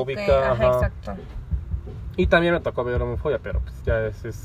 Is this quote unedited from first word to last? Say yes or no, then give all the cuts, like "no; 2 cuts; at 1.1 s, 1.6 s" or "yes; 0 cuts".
yes; 0 cuts